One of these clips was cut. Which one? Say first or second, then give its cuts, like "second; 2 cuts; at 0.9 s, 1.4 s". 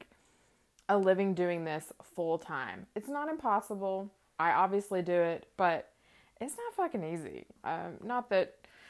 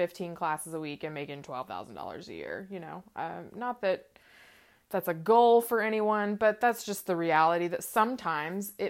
first; 2 cuts; at 4.3 s, 7.6 s